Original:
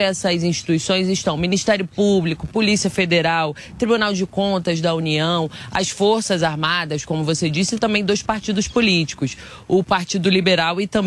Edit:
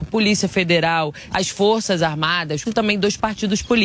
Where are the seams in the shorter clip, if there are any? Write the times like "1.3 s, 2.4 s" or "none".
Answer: 1.3 s, 2.6 s